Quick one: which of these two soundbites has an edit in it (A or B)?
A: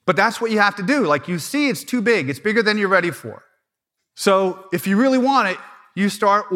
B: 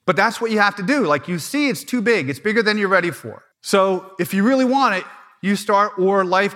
B